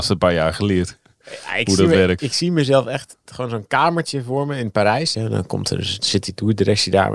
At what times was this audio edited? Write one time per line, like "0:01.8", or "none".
0:02.2
0:05.1